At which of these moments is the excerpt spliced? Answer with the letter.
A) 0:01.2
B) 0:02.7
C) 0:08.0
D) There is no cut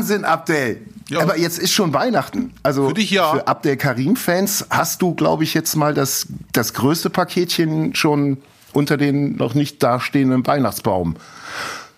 D